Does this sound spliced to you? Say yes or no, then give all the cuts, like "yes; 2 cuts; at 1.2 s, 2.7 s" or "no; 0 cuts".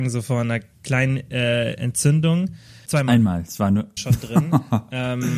yes; 2 cuts; at 2.9 s, 4.0 s